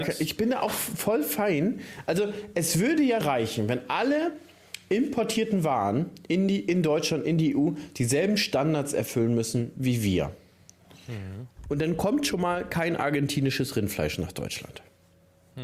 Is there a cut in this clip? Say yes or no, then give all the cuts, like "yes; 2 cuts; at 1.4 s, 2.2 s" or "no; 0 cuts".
yes; 1 cut; at 3.2 s